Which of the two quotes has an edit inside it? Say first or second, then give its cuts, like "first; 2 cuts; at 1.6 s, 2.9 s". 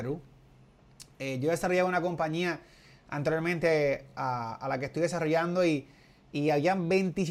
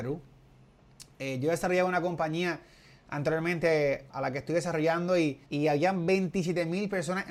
second; 2 cuts; at 4.1 s, 5.5 s